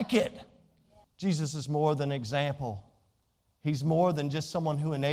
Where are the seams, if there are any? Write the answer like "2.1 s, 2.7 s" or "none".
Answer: 1.0 s